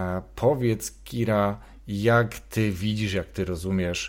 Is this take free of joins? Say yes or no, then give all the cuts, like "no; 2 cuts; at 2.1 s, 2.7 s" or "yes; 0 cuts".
yes; 0 cuts